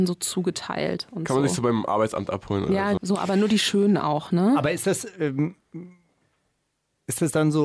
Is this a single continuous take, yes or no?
no